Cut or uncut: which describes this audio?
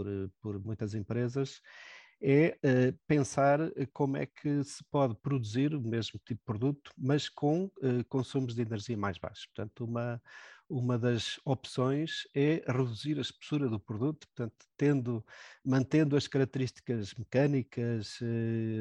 uncut